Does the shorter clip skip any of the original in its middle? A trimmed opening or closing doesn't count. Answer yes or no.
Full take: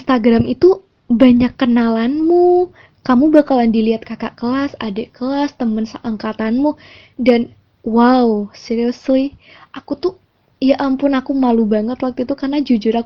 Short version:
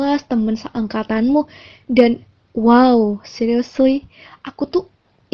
no